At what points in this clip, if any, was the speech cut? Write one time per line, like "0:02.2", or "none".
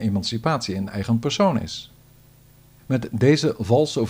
0:02.8

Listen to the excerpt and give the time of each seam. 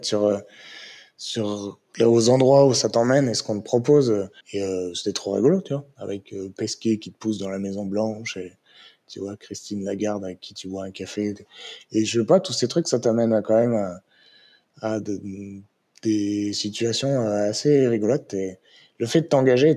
0:04.4

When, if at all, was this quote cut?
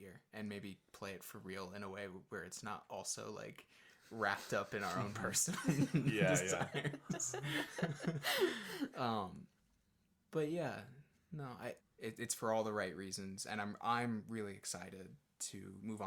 0:11.8

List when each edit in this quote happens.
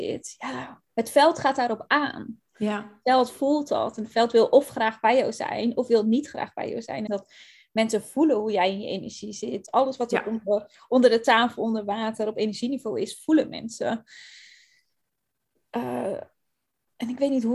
0:07.1
0:09.7

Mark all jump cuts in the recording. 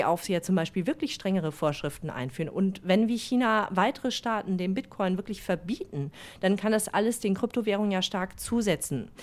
none

